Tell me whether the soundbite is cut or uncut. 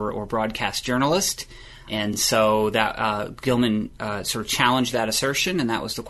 uncut